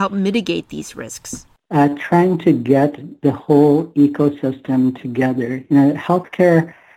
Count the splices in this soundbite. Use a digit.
1